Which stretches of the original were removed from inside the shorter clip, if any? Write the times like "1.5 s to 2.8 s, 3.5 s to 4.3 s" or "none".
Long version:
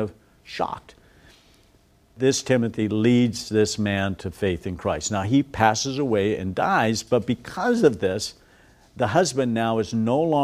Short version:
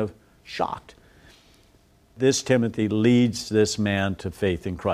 none